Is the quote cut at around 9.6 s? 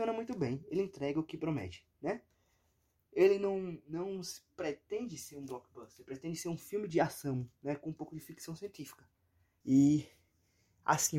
yes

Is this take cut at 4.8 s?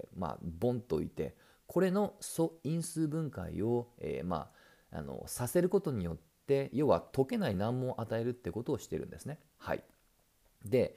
no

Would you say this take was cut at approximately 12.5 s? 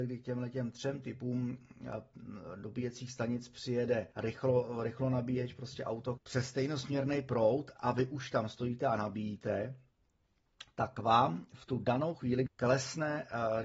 yes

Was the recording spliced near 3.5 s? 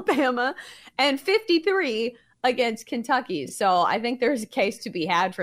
no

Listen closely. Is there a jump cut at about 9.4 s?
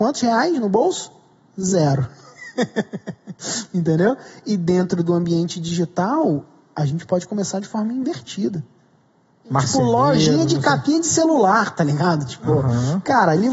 yes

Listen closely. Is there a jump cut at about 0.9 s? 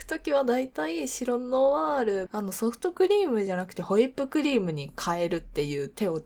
no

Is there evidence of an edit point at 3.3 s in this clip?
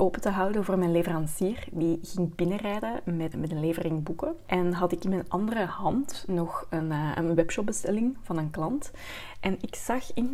yes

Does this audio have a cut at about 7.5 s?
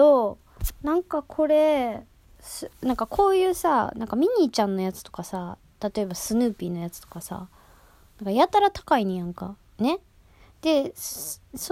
no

